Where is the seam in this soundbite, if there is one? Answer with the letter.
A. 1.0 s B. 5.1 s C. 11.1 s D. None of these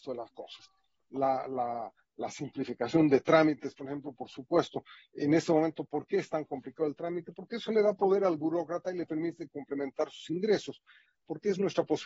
C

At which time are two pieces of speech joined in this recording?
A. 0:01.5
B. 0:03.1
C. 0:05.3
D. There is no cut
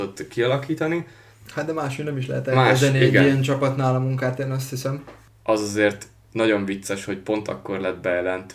C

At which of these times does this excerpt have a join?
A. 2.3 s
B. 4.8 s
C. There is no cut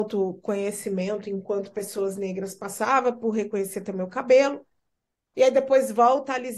C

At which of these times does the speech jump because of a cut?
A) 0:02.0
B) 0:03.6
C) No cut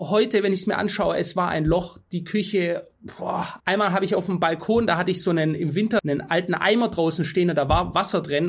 B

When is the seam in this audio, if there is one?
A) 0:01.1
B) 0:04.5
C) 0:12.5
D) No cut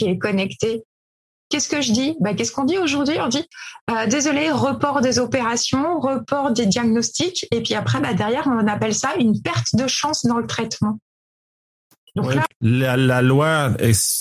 C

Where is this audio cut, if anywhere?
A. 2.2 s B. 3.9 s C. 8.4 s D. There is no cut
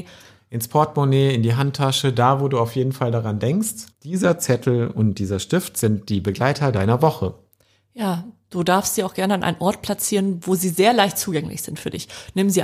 B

